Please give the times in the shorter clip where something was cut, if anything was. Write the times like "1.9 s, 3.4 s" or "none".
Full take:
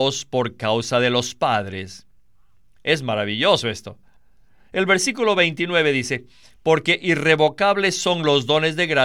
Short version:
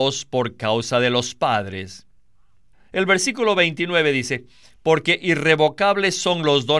2.7 s